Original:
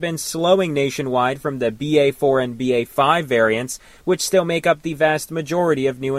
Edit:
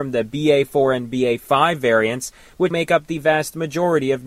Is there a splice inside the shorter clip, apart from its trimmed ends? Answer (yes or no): yes